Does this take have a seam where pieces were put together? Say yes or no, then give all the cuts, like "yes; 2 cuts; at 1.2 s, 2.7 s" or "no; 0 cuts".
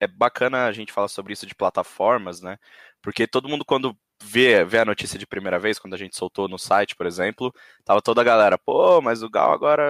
no; 0 cuts